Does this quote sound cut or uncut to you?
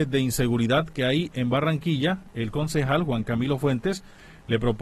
uncut